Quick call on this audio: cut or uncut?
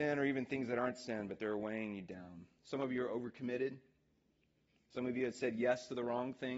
uncut